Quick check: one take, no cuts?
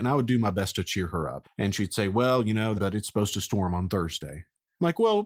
no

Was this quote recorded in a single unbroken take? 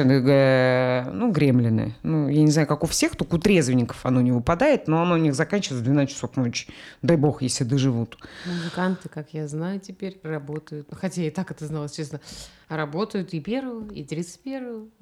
no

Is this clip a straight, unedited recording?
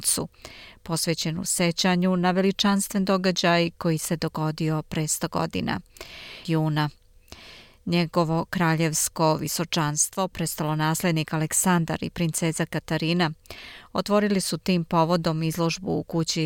no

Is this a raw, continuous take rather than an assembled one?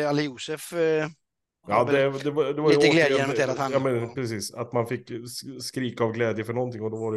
yes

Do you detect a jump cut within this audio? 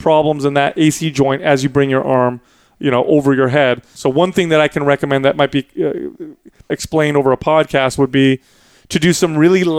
yes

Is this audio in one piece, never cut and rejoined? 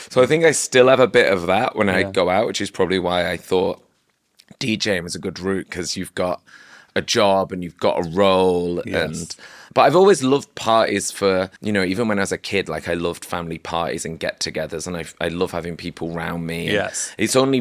no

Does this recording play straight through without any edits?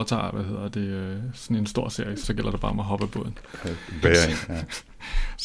no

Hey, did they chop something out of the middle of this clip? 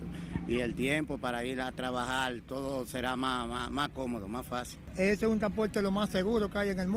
no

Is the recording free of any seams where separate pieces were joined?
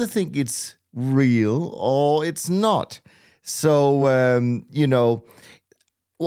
yes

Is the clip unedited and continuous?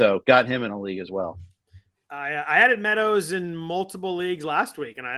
yes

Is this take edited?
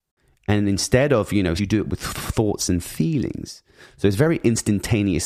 yes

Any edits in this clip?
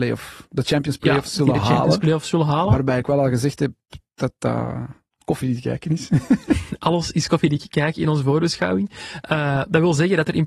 no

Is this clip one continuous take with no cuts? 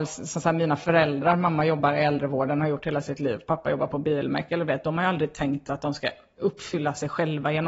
yes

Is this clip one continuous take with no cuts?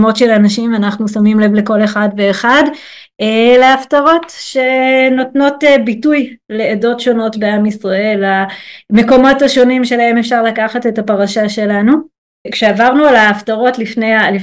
yes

